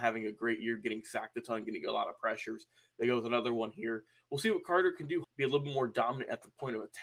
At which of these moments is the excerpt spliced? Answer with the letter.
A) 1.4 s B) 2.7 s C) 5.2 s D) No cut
C